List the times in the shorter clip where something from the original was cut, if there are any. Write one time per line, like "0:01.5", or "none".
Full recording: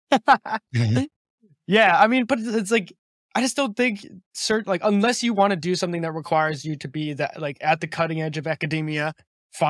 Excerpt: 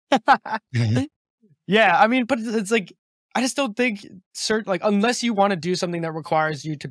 none